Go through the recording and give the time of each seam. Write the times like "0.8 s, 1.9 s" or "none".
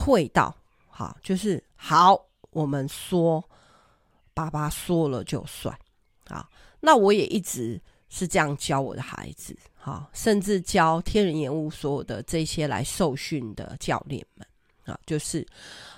none

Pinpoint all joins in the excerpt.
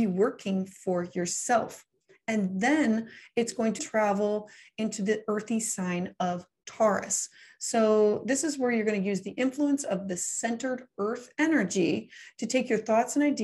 3.8 s

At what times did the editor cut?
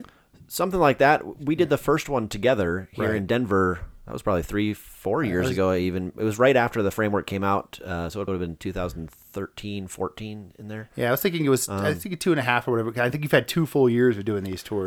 8.3 s

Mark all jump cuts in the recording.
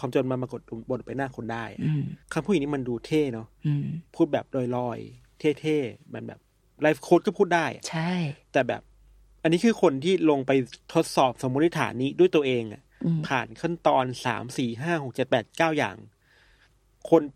2.2 s

